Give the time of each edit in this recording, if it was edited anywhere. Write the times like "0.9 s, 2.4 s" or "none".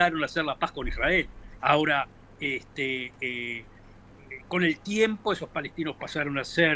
1.6 s